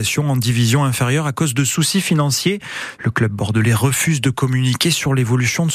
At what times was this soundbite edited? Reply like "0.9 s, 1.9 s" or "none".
3.0 s